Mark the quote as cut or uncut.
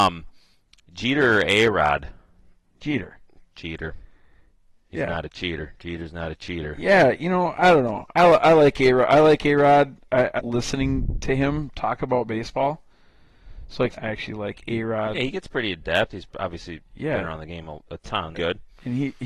cut